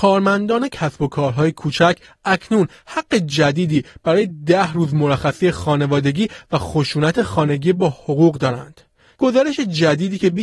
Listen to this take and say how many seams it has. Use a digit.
1